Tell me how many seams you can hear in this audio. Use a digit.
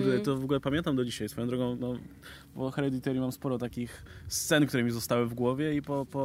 0